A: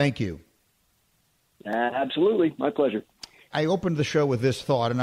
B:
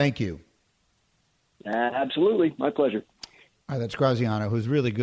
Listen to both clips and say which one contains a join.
A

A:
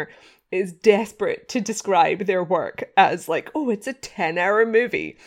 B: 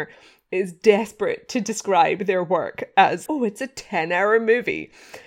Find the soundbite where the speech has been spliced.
B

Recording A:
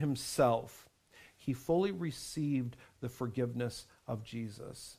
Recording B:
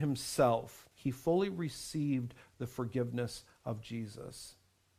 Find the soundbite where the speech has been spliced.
B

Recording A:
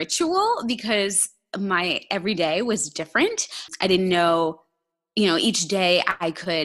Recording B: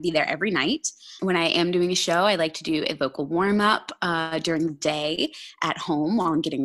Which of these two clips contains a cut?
B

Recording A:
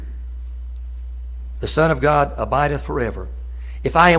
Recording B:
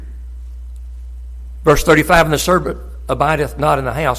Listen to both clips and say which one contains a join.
A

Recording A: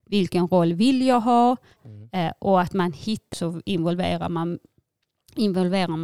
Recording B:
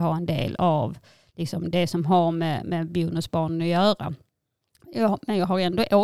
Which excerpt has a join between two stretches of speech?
A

